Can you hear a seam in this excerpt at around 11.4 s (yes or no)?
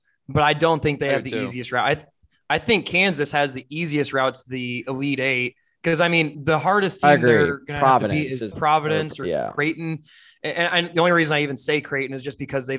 no